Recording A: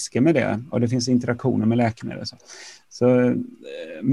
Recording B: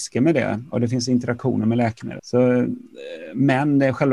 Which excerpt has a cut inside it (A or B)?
B